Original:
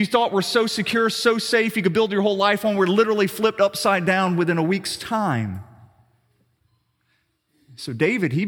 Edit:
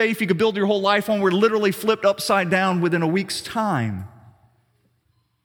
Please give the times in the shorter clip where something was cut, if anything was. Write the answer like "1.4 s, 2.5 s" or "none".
none